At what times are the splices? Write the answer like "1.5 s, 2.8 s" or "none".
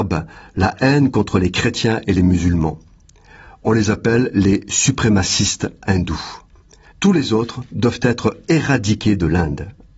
6.9 s

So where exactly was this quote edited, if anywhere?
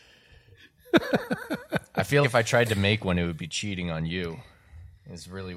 2.2 s

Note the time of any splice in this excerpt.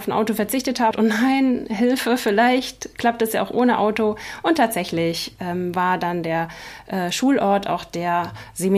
0.9 s

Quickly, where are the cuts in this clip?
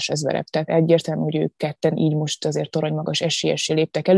none

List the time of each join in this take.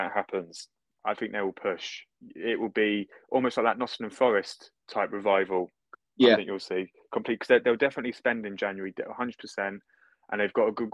1.0 s

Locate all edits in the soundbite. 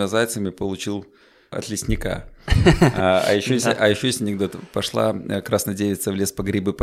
none

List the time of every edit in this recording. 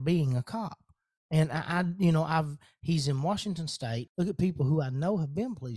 4.1 s

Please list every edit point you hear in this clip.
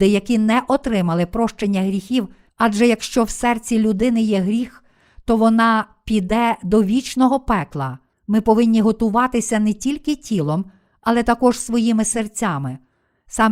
2.5 s, 8.1 s

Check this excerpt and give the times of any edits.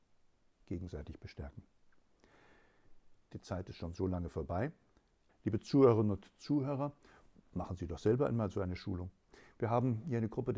3.3 s, 5.3 s

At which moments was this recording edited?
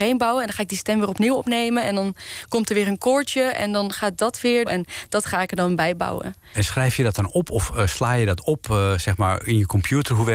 4.6 s

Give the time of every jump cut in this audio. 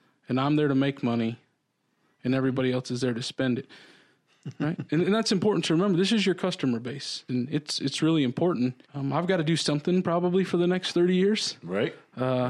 7.3 s, 8.8 s

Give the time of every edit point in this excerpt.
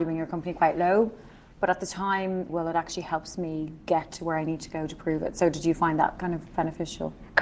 2.5 s

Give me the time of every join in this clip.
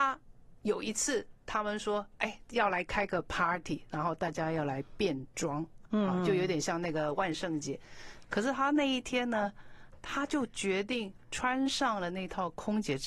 8.2 s

